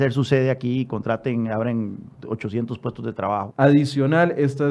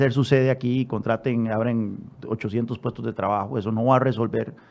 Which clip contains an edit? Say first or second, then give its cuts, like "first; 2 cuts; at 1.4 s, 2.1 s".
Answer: first; 1 cut; at 3.5 s